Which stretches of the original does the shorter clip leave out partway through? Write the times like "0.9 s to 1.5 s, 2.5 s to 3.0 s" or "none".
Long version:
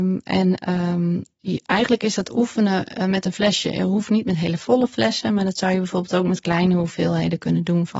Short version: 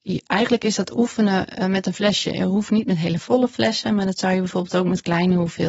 none